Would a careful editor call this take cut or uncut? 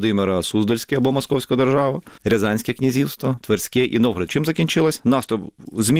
cut